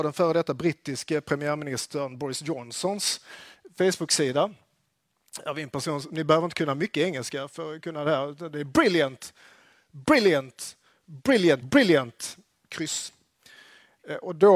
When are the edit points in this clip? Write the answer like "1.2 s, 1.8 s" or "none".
11.6 s